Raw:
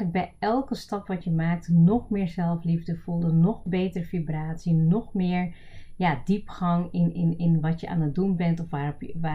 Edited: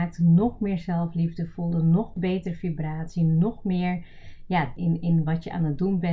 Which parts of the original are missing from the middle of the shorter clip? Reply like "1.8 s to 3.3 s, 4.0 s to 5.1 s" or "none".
6.3 s to 7.1 s

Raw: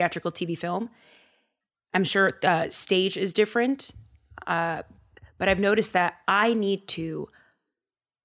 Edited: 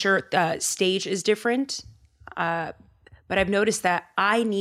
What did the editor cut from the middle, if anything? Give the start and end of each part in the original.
none

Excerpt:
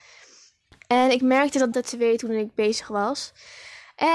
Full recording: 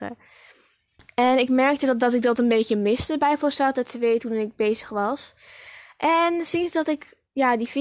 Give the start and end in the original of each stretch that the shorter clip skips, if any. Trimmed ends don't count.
2.0 s to 3.7 s

